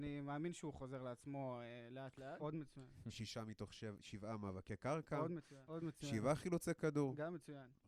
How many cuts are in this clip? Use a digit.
2